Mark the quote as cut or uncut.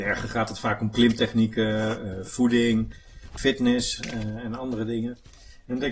uncut